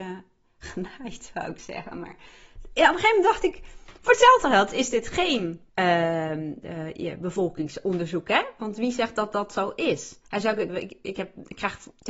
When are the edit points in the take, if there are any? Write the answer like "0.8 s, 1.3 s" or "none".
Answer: 5.7 s, 10.7 s